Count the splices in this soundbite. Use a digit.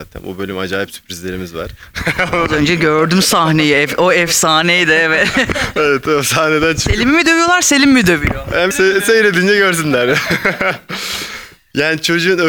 1